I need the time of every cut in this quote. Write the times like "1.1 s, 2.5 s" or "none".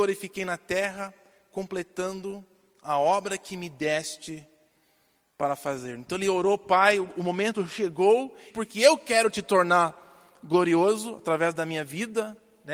8.5 s